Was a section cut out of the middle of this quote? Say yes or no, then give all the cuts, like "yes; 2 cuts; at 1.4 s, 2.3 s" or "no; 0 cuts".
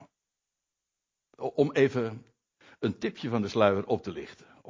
no; 0 cuts